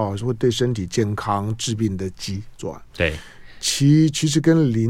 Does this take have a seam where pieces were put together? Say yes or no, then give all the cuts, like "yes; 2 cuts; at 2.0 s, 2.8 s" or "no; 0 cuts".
no; 0 cuts